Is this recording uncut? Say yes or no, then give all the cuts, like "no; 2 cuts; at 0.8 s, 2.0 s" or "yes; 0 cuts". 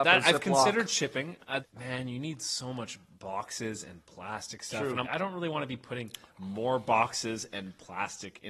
no; 2 cuts; at 1.6 s, 5.0 s